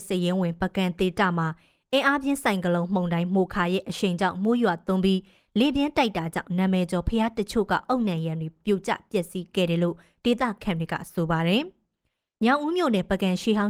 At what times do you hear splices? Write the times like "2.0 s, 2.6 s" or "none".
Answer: none

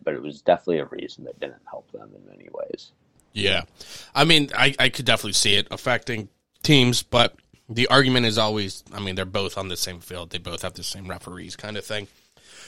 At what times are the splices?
none

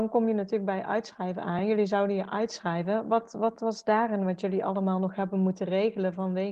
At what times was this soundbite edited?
none

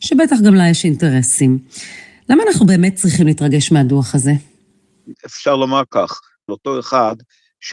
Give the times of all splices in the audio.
6.5 s

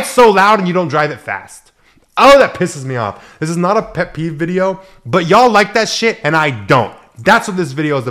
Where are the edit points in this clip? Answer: none

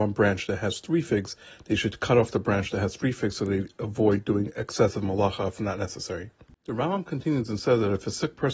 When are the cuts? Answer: 6.5 s

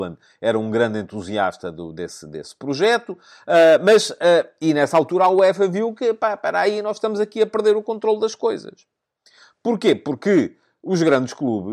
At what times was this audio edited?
none

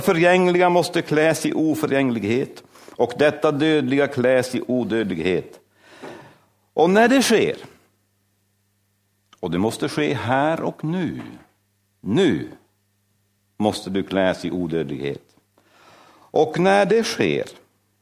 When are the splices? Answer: 12.0 s

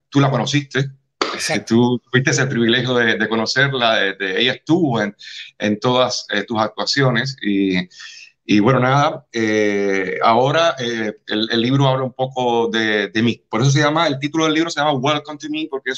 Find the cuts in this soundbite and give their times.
none

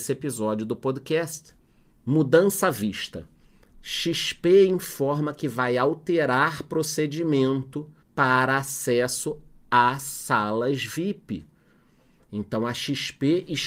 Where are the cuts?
8.0 s

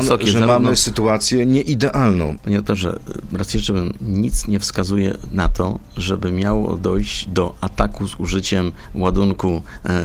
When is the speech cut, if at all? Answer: 2.4 s

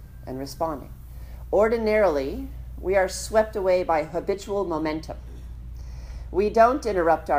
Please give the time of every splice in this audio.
none

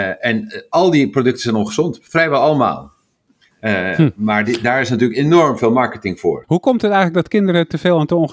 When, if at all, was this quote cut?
3.5 s, 6.4 s

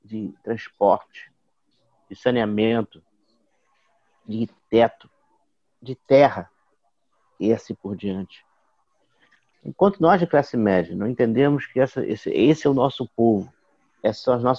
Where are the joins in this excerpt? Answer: 9.5 s

